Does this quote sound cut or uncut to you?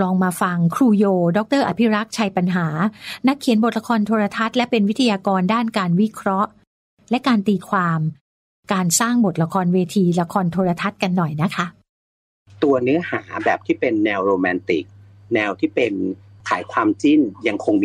uncut